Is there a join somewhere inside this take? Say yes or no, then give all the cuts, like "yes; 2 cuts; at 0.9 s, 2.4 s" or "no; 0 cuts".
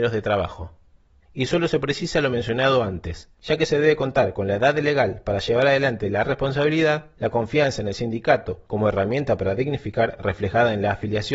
yes; 1 cut; at 1.2 s